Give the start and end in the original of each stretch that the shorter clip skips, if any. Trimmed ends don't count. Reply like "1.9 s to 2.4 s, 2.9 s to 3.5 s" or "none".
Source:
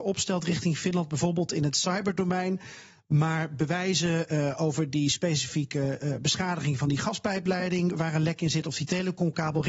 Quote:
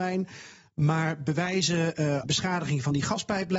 4.6 s to 6.2 s